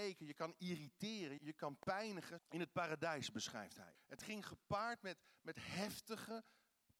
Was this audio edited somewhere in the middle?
yes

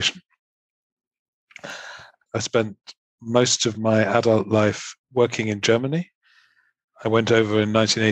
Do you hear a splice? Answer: yes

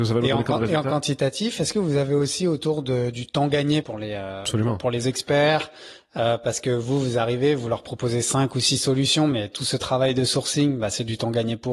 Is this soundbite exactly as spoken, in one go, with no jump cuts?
no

